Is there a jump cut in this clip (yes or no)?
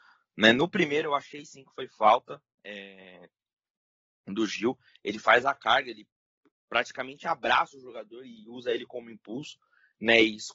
no